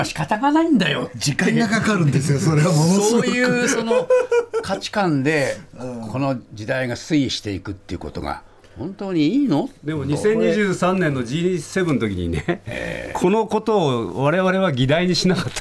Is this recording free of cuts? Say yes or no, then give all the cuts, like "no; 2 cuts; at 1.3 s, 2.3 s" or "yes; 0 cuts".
yes; 0 cuts